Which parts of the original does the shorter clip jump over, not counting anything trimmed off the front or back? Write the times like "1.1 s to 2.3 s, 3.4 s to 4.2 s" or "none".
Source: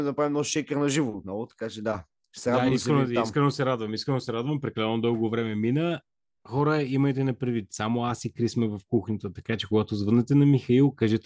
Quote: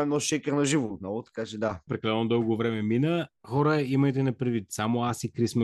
2.1 s to 4.6 s, 6.1 s to 6.4 s